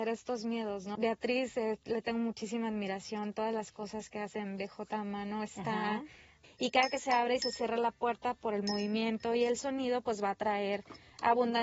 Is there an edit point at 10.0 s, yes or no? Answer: no